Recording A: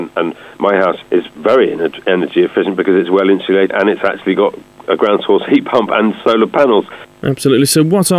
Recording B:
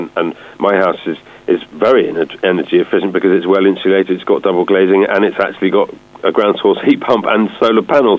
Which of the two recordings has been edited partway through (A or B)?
A